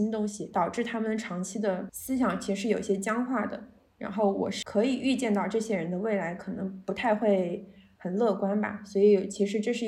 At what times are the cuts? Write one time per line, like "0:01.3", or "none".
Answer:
none